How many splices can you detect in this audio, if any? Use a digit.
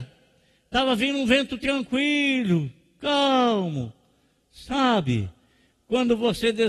0